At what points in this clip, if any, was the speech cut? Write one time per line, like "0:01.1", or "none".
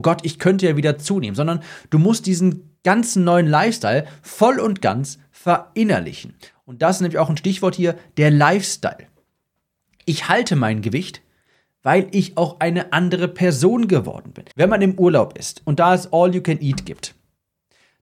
0:14.5